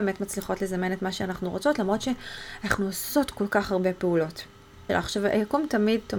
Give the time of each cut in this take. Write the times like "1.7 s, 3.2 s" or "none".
4.9 s